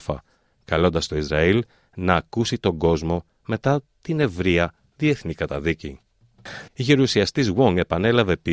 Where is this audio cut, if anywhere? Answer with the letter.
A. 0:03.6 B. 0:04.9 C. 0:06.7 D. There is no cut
C